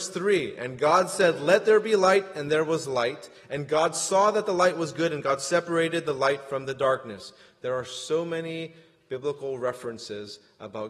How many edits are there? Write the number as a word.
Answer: zero